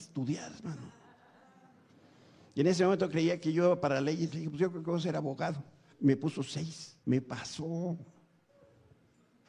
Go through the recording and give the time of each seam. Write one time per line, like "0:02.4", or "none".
0:05.9
0:07.0